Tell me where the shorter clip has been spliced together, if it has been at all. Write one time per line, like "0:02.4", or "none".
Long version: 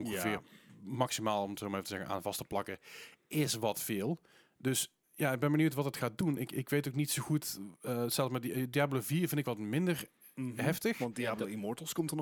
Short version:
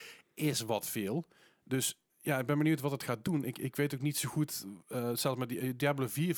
none